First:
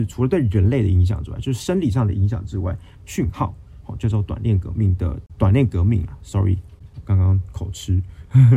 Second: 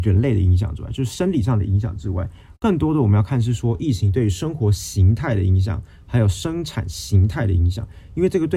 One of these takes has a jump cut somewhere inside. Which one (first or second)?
first